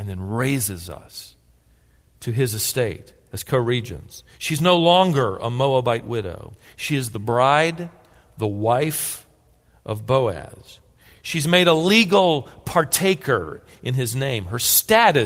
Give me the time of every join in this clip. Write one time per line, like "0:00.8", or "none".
none